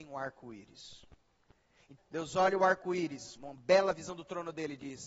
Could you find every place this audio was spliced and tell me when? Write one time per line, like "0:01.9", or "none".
0:02.0
0:03.4